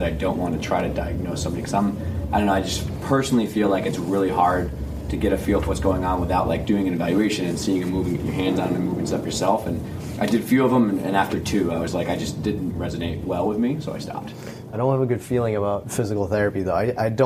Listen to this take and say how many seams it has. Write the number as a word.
one